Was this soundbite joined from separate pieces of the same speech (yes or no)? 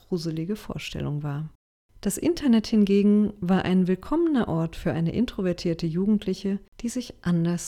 no